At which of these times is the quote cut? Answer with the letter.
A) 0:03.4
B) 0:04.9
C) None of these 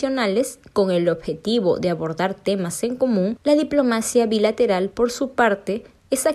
C